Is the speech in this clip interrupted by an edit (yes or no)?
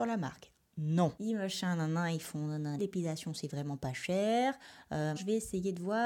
yes